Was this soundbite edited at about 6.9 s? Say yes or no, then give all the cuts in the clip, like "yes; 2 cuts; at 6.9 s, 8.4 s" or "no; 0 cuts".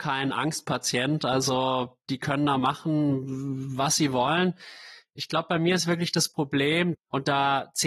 yes; 2 cuts; at 5.0 s, 6.9 s